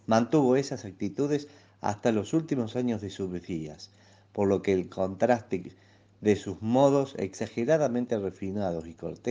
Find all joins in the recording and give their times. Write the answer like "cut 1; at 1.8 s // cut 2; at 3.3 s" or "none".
none